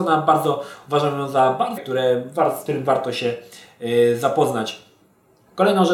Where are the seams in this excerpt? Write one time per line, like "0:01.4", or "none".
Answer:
0:01.8